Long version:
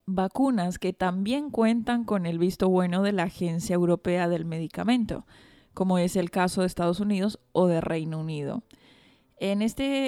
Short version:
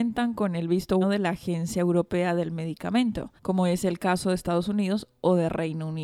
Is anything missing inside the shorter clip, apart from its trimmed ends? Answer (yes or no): yes